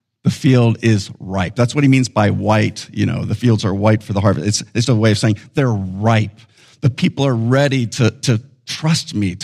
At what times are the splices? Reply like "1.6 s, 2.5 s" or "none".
4.8 s